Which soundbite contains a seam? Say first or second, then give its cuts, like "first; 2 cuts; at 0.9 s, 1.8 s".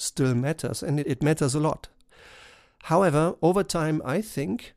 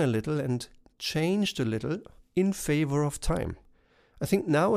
first; 1 cut; at 1.0 s